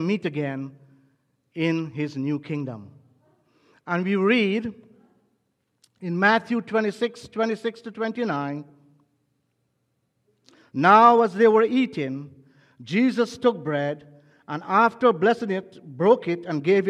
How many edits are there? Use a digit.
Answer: 0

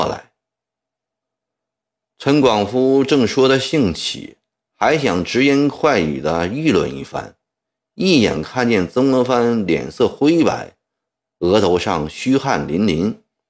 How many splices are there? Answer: 1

